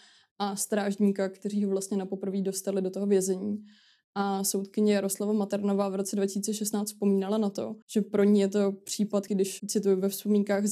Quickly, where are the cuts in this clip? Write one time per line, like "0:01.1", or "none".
0:07.8
0:09.3